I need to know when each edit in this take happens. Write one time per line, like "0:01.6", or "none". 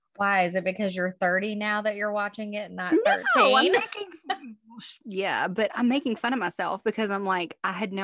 none